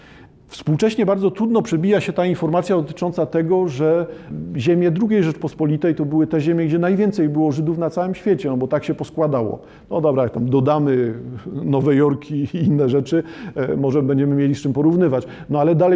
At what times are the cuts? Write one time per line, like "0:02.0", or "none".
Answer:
none